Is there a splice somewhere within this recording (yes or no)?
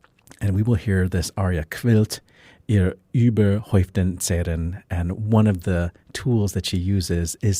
no